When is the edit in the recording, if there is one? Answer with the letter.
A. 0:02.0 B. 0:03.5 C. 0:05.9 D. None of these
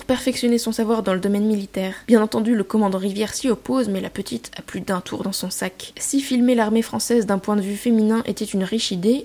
A